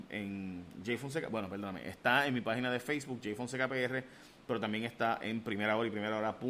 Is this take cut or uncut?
uncut